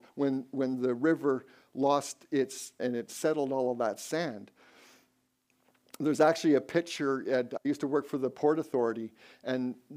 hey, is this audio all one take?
no; 1 cut; at 2.8 s

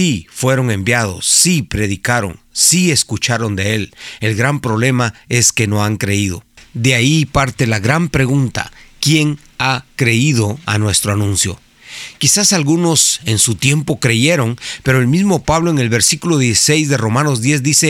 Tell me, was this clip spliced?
no; 0 cuts

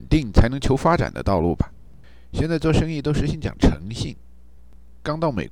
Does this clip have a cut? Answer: no; 0 cuts

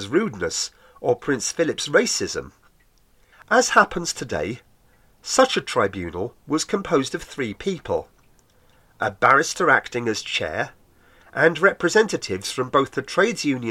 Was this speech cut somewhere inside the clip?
yes; 1 cut; at 3.3 s

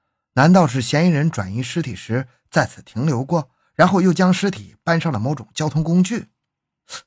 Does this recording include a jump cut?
no; 0 cuts

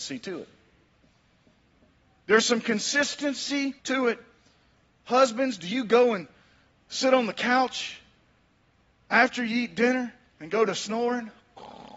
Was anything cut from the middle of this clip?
yes; 1 cut; at 3.8 s

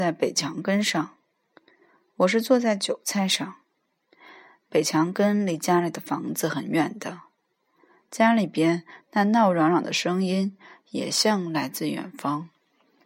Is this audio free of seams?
yes; 0 cuts

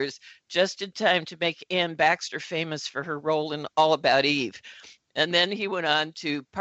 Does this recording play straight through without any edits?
yes; 0 cuts

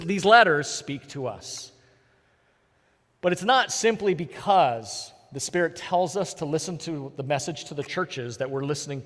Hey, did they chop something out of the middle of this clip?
no; 0 cuts

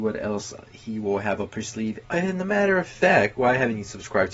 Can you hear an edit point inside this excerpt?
yes; 1 cut; at 2.0 s

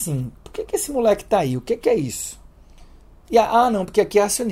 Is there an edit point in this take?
yes; 1 cut; at 3.2 s

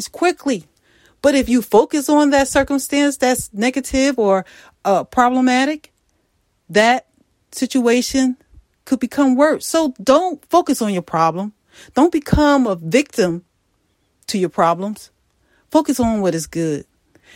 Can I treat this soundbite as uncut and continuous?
yes; 0 cuts

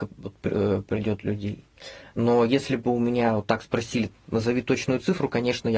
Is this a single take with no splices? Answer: yes; 0 cuts

